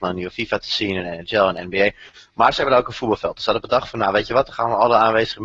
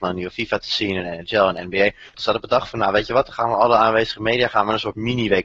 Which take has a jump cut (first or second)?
second